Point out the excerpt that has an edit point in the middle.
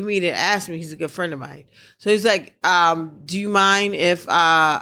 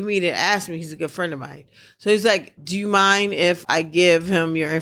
second; 2 cuts; at 2.6 s, 3.6 s

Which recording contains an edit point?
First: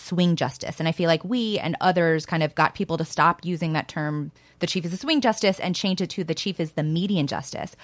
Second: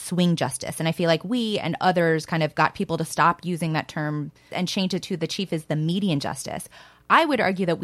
second; 1 cut; at 4.5 s

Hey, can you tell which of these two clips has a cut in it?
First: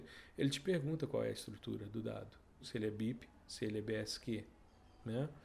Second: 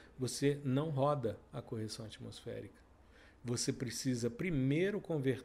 first; 1 cut; at 2.6 s

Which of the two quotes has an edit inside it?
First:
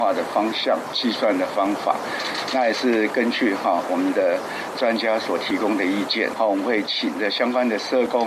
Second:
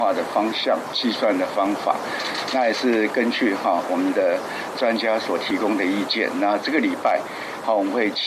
first; 1 cut; at 6.3 s

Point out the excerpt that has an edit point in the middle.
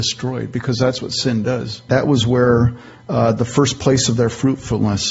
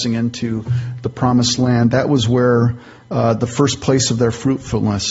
first; 1 cut; at 1.9 s

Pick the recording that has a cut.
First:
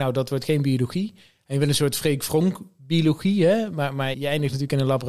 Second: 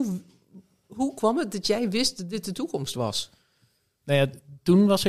first; 1 cut; at 4.1 s

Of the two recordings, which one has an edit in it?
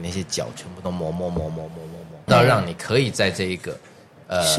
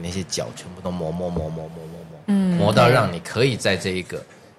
first; 1 cut; at 2.3 s

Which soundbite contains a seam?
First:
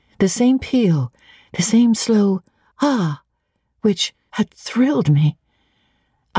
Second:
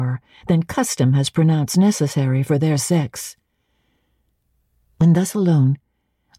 first; 2 cuts; at 2.7 s, 4.3 s

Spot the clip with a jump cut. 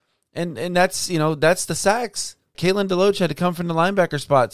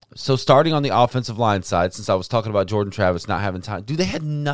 first; 1 cut; at 2.5 s

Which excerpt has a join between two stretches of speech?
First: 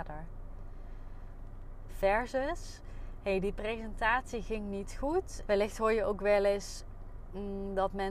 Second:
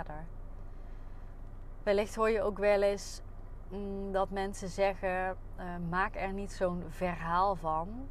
first; 2 cuts; at 1.8 s, 5.4 s

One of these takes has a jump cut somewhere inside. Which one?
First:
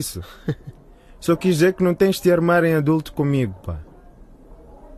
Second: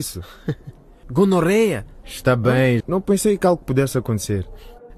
second; 2 cuts; at 1.0 s, 2.8 s

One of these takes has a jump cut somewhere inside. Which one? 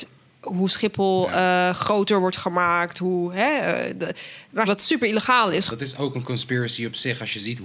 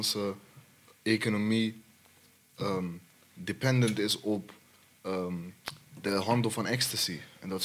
first; 2 cuts; at 4.7 s, 5.7 s

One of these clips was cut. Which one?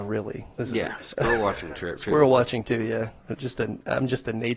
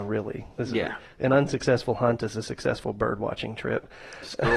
first; 1 cut; at 1.0 s

